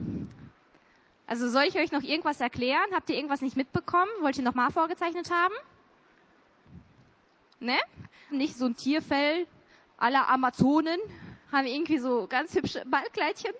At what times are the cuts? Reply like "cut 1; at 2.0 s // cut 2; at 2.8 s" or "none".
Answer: cut 1; at 8.3 s // cut 2; at 11.4 s